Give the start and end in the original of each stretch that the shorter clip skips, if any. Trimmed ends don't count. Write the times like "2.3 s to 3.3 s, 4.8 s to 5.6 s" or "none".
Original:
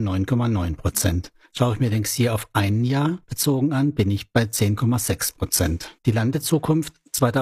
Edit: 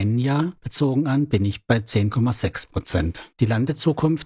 none